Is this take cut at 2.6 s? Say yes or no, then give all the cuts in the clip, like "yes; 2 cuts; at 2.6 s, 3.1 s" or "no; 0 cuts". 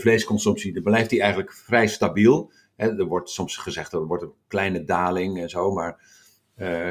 no; 0 cuts